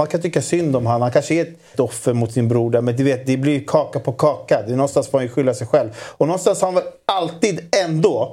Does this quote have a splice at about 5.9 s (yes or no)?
no